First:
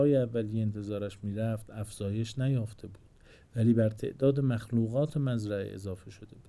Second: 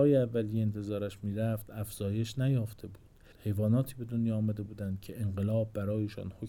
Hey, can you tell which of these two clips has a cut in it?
second; 1 cut; at 3.3 s

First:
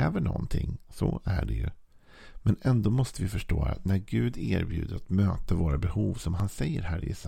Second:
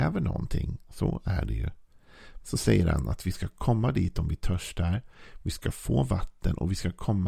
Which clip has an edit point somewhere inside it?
second; 1 cut; at 2.4 s

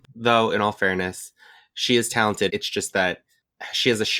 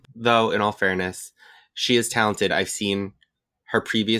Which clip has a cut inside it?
first; 1 cut; at 2.5 s

